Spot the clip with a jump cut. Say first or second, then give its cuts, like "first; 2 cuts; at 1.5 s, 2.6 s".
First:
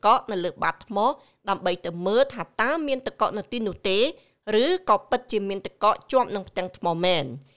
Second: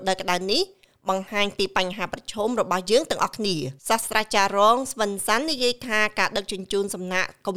second; 1 cut; at 3.8 s